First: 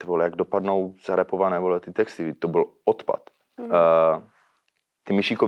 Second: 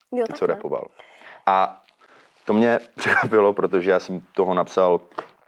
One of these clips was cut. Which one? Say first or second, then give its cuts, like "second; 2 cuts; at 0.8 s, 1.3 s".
first; 1 cut; at 3.6 s